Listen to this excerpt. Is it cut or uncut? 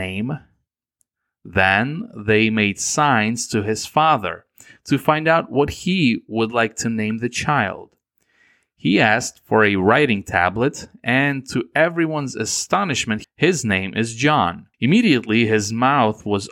cut